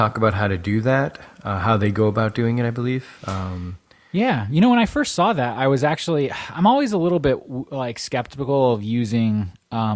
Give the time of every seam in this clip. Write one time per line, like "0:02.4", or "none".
none